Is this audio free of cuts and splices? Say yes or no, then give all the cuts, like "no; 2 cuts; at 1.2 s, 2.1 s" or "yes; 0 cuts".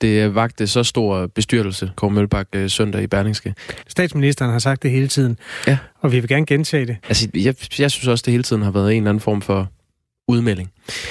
no; 3 cuts; at 2.0 s, 3.8 s, 7.0 s